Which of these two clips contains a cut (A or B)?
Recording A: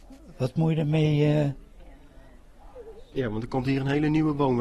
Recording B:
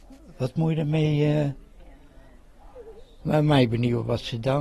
A